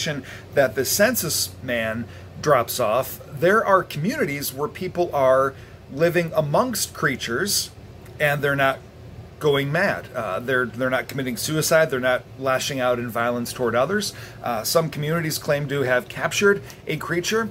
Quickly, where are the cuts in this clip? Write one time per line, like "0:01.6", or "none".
none